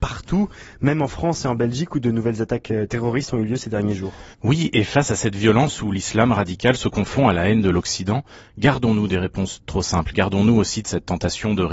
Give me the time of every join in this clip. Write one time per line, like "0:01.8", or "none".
0:04.3
0:10.1